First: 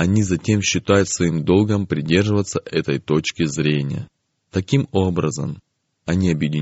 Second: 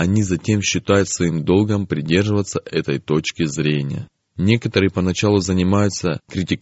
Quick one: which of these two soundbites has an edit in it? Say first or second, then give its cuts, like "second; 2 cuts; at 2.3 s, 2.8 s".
second; 1 cut; at 4.2 s